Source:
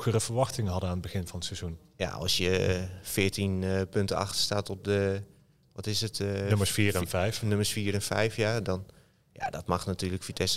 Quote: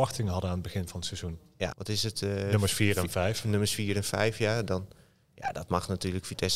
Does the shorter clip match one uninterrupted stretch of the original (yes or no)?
no